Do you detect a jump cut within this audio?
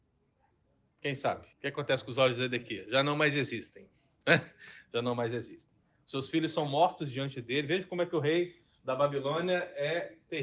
yes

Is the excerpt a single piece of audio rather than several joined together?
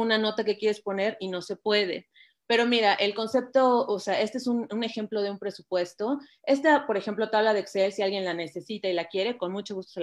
yes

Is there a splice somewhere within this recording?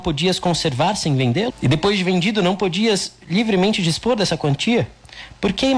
yes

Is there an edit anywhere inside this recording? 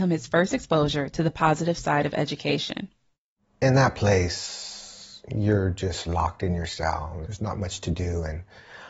no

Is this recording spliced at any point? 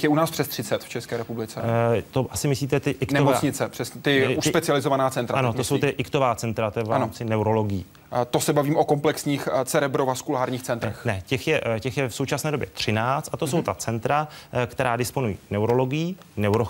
yes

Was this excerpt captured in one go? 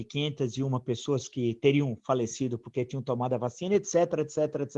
yes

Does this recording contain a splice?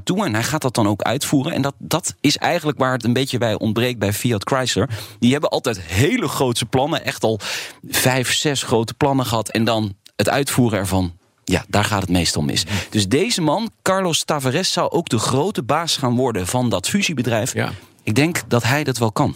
no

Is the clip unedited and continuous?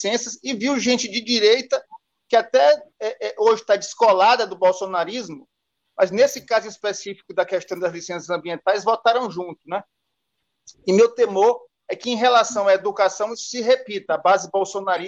yes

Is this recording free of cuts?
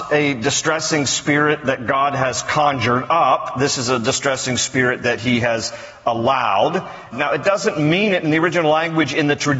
no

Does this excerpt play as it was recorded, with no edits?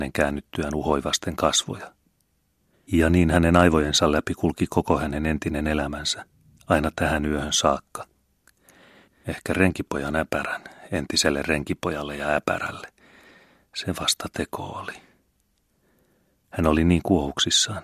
no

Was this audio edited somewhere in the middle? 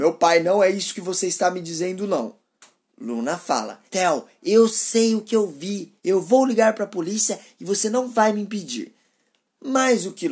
yes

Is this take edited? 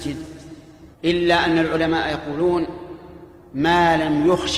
yes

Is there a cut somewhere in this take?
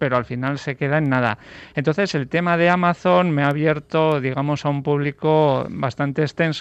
no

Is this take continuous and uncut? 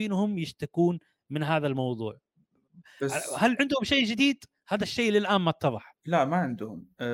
no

